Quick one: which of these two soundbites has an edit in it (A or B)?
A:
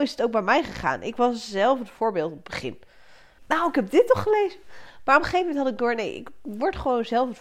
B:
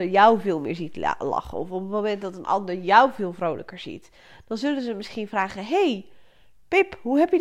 A